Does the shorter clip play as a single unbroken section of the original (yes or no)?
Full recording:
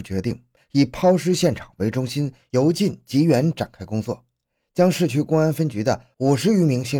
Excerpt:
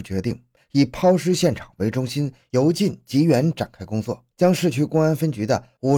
no